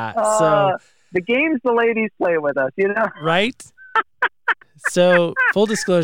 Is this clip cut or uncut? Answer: cut